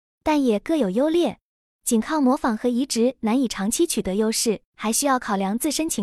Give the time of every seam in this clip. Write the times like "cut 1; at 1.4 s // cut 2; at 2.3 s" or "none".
cut 1; at 1.6 s // cut 2; at 4.7 s